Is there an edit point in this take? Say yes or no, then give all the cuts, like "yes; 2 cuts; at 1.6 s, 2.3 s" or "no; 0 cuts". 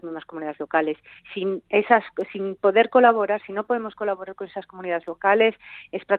no; 0 cuts